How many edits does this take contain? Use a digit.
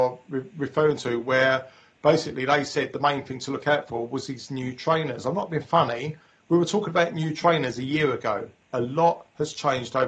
0